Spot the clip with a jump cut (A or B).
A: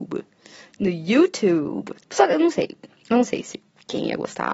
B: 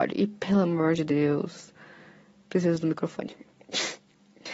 A